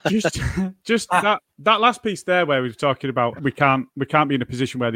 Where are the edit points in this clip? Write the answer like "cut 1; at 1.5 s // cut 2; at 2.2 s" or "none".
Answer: cut 1; at 1.1 s // cut 2; at 3.4 s